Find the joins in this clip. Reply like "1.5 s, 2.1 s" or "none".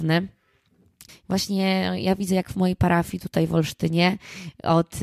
1.1 s